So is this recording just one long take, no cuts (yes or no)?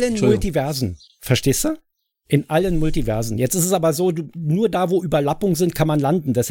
yes